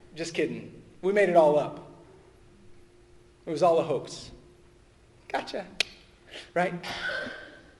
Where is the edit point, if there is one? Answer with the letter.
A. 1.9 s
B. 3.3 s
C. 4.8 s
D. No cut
D